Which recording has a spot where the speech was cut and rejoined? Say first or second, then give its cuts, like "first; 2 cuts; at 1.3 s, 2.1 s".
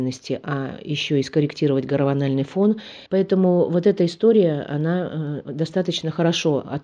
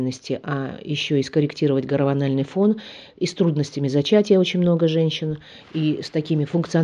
first; 1 cut; at 3.1 s